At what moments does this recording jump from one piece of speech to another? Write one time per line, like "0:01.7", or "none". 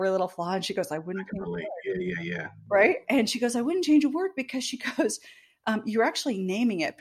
none